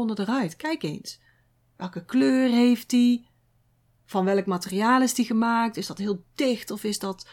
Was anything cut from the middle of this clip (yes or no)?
no